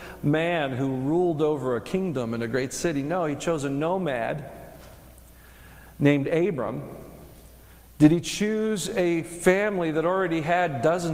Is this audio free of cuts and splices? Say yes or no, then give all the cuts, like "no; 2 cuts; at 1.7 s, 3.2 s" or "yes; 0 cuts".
yes; 0 cuts